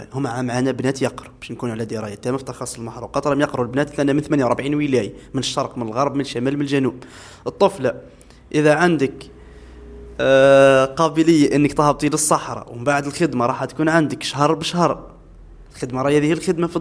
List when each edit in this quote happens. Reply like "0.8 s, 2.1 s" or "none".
none